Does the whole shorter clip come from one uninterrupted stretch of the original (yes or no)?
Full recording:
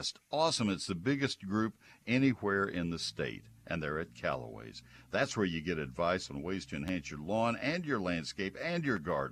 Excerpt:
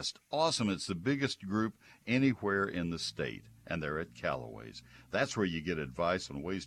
yes